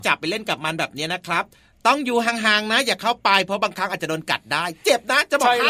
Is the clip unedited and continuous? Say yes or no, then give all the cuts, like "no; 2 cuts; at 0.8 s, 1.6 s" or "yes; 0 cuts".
yes; 0 cuts